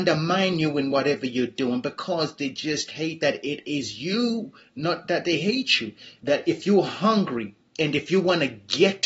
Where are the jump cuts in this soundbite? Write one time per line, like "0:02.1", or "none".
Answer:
0:06.2